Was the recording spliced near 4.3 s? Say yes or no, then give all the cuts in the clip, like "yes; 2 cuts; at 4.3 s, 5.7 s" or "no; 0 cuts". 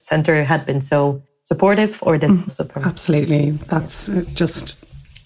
no; 1 cut; at 2.5 s